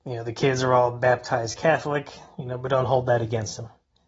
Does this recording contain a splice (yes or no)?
no